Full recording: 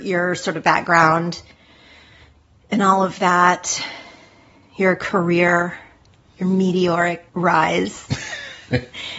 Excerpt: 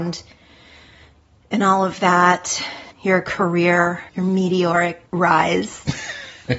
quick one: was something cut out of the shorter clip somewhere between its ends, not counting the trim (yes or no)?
yes